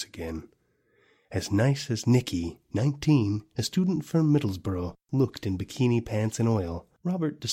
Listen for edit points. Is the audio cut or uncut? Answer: uncut